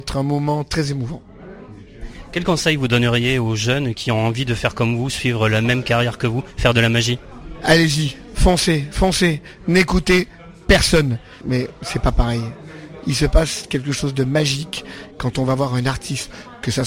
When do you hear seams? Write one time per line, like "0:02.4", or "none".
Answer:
0:11.4